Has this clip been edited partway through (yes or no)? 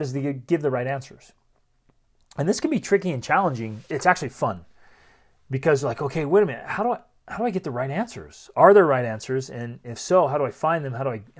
yes